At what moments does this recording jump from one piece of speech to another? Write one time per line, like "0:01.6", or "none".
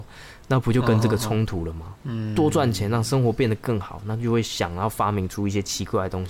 0:02.0

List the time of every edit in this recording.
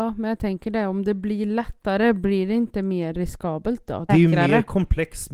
0:04.1

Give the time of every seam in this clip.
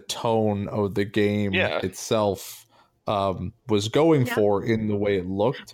none

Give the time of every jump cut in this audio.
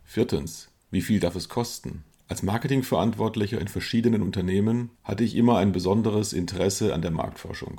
0:02.1
0:04.9

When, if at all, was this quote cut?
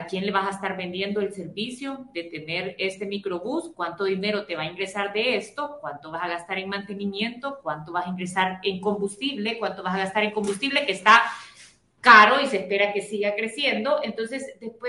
none

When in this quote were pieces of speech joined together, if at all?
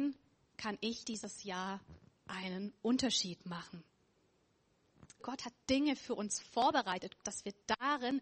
0:05.2
0:07.2

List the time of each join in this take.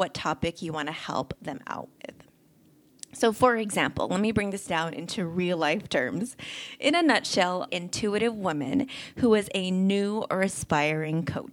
0:07.7

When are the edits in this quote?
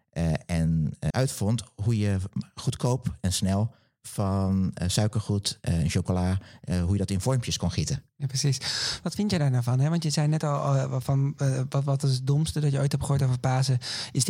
0:01.1

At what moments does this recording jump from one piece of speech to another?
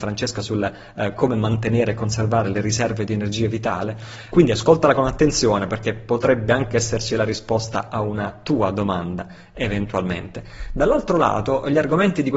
0:04.3

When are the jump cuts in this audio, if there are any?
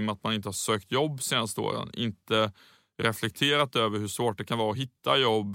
none

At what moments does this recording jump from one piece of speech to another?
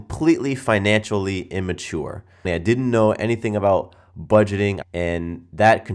0:02.4
0:04.8

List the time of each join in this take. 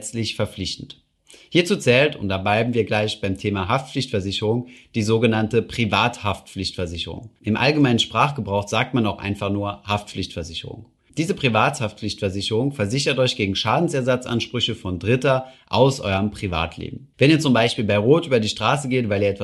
none

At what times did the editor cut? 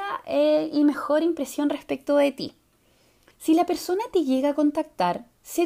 0:03.3

